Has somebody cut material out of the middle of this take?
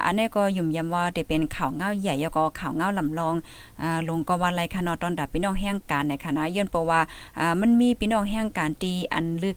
no; 0 cuts

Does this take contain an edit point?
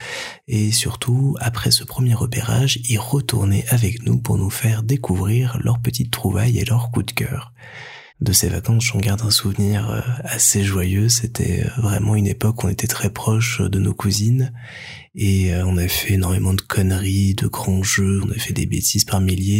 yes; 2 cuts; at 8.1 s, 18.2 s

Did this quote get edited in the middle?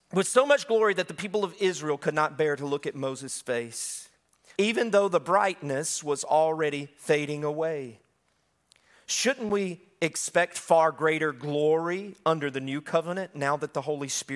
yes; 1 cut; at 4.5 s

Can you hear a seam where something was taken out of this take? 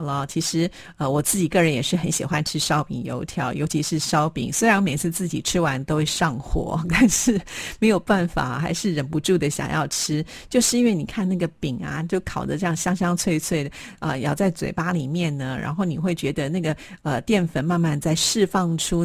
no; 0 cuts

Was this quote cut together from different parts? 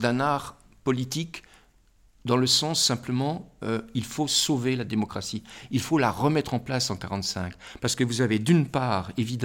no; 0 cuts

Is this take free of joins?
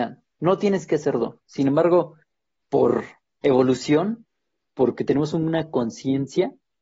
yes; 0 cuts

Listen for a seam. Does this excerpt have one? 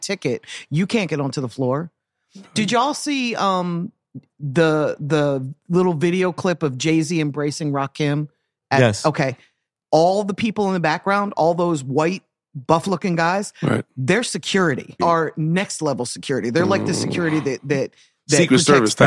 yes; 1 cut; at 15.0 s

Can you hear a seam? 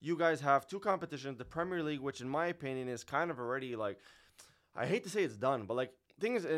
no; 0 cuts

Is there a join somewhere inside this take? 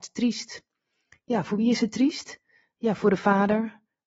no; 0 cuts

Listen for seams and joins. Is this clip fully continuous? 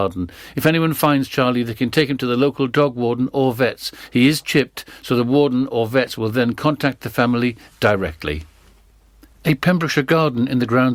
yes; 0 cuts

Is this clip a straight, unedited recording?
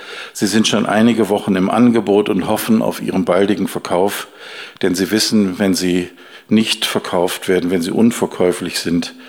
yes; 0 cuts

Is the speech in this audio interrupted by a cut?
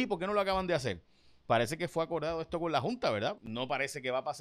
yes; 1 cut; at 3.3 s

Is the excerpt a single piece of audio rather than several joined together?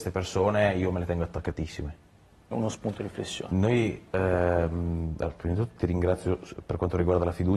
no; 1 cut; at 2.5 s

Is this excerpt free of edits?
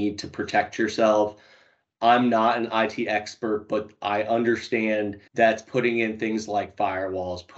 no; 1 cut; at 5.3 s

